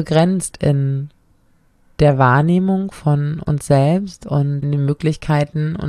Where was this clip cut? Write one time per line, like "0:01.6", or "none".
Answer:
0:04.6

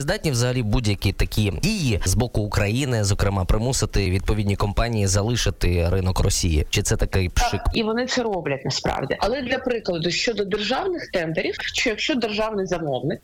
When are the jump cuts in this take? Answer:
0:07.7
0:09.2
0:11.6

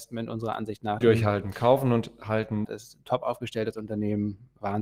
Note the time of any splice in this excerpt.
0:01.0
0:02.6

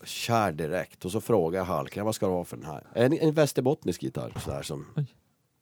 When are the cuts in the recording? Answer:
0:02.8
0:04.4

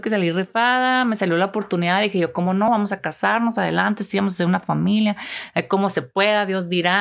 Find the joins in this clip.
none

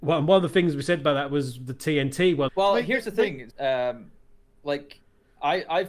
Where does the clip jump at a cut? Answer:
0:02.5
0:03.5

